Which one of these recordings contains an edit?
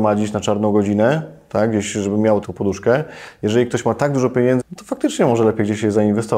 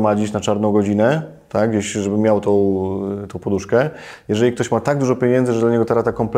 first; 2 cuts; at 2.4 s, 4.6 s

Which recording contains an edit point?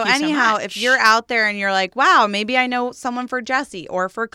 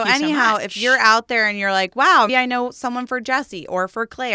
second; 1 cut; at 2.3 s

